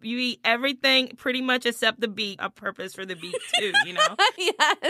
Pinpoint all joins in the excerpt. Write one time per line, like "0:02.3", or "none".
0:02.4